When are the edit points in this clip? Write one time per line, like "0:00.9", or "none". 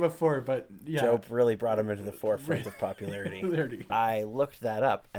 0:03.9